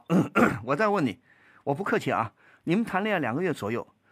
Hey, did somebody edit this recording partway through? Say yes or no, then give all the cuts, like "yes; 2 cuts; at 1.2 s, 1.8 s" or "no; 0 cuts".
no; 0 cuts